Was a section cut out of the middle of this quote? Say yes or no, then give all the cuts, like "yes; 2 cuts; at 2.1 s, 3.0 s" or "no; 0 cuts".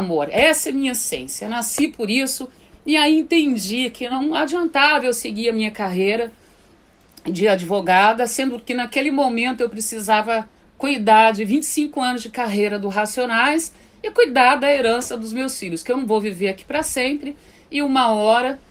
no; 0 cuts